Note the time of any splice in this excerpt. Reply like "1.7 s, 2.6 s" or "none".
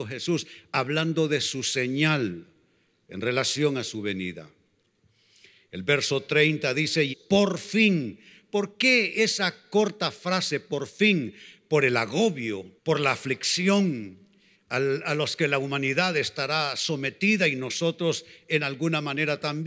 7.1 s, 12.8 s